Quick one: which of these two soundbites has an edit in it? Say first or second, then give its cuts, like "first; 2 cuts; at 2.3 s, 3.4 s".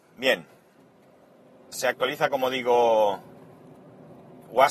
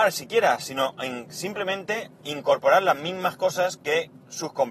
first; 1 cut; at 1.7 s